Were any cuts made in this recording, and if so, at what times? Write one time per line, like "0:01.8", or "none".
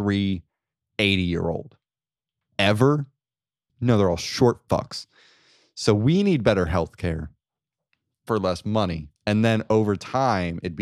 0:03.7
0:09.2